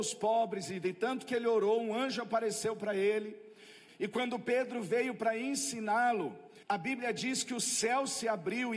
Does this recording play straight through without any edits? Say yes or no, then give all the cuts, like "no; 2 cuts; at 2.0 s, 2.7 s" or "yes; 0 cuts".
no; 2 cuts; at 3.9 s, 6.6 s